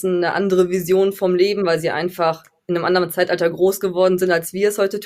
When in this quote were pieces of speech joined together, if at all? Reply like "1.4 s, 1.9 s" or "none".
none